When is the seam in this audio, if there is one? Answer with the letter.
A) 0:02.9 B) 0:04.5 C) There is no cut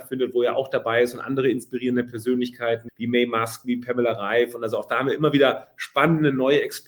A